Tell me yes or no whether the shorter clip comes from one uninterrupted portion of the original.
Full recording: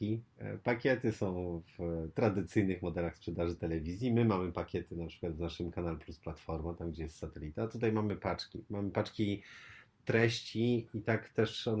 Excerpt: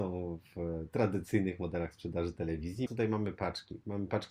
no